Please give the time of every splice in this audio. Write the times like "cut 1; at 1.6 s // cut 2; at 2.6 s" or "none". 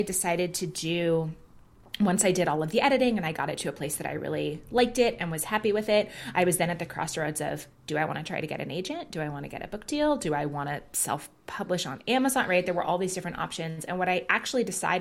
none